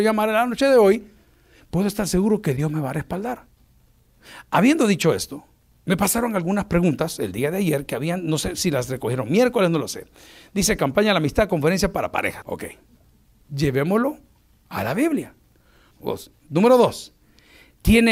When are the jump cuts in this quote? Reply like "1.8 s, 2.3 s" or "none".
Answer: 12.4 s, 15.9 s

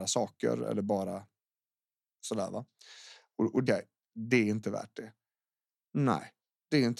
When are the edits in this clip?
3.7 s

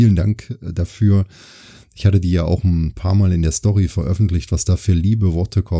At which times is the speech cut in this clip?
none

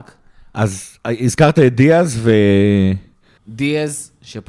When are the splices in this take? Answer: 3.4 s

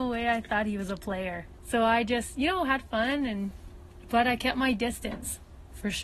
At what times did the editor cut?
1.6 s

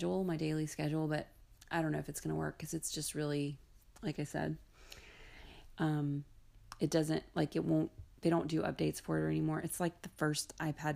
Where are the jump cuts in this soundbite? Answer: 5.7 s

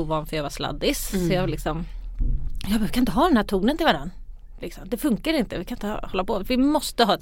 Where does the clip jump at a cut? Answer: none

